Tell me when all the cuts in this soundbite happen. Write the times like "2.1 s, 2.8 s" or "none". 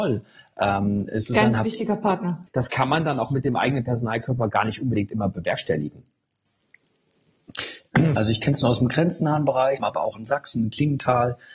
2.5 s, 8.2 s, 9.8 s